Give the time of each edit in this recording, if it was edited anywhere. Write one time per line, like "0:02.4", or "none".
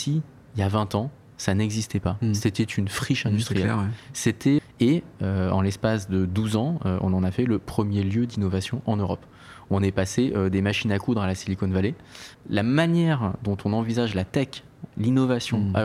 0:04.6
0:12.3
0:14.9